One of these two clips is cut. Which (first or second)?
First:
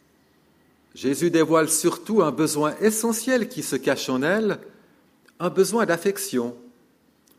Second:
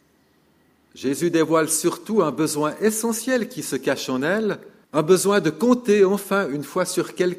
second